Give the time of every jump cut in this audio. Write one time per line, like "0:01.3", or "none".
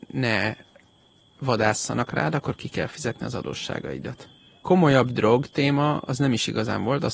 0:04.6

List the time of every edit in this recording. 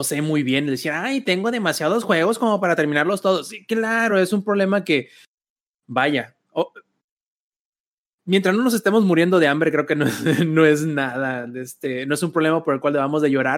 none

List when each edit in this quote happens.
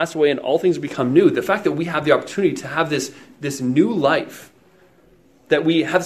none

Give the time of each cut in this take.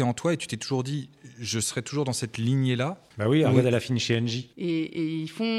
0:03.1
0:04.5

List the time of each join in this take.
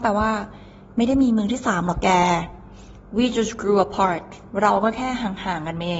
none

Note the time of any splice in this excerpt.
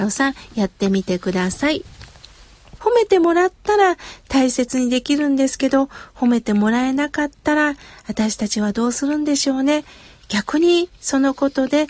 0:02.8

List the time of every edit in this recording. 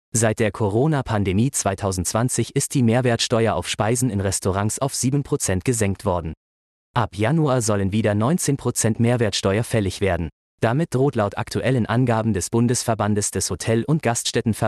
none

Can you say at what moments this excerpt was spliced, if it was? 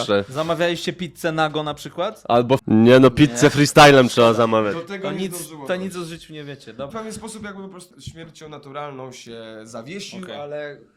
0:02.6
0:06.9
0:07.9

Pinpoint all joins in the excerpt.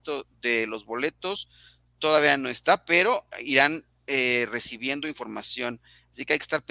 none

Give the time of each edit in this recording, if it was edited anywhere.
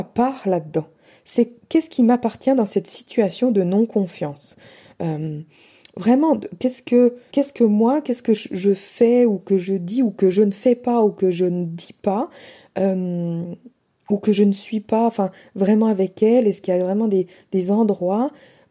0:07.3

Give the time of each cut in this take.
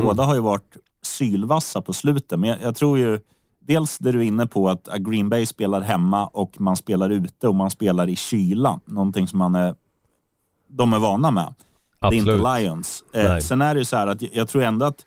none

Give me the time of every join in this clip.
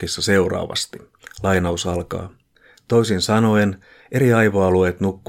none

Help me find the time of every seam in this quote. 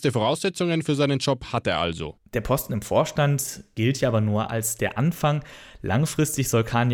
none

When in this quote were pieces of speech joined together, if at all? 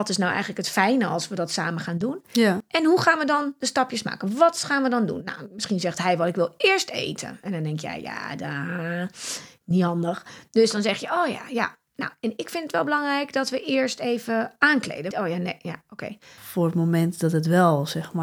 0:15.1
0:16.4

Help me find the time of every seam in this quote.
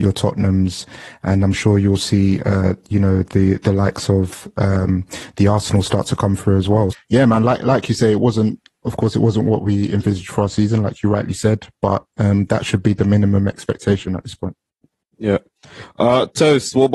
0:06.9

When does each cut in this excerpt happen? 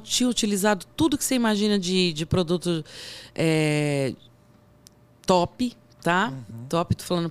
none

